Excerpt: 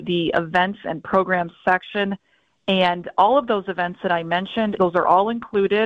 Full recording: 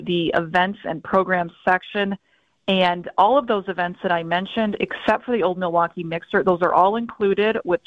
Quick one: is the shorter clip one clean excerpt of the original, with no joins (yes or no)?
no